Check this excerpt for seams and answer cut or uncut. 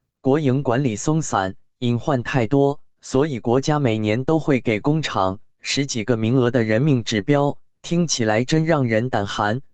uncut